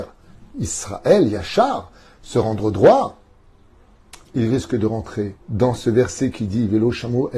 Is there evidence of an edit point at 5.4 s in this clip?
yes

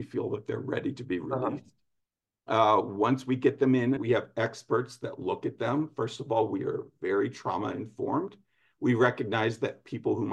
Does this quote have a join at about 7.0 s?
no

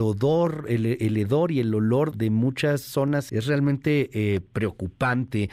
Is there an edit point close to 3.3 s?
yes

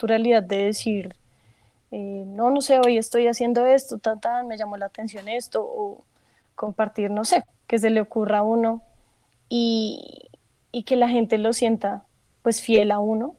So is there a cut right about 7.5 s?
yes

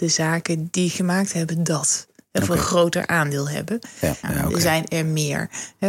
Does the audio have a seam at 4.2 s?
yes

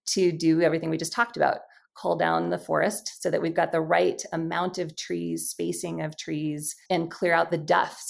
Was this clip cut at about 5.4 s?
no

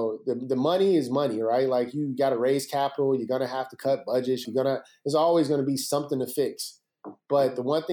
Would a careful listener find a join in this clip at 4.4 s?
yes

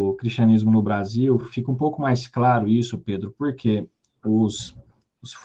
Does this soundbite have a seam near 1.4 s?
no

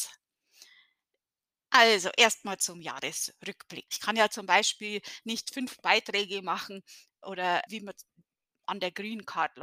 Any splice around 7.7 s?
yes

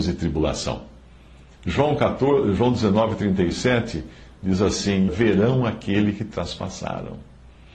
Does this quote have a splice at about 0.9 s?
no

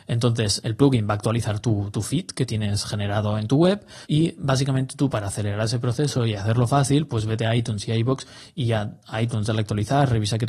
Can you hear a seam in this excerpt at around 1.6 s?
no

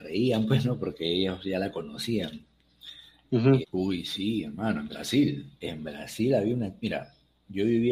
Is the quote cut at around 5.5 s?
yes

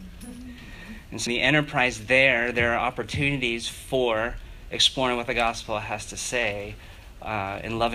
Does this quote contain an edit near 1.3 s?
yes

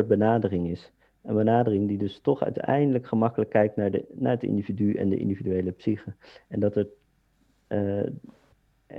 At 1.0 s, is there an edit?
no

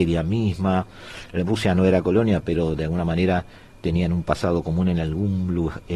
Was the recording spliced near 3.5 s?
no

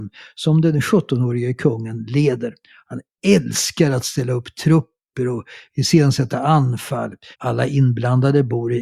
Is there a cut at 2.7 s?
no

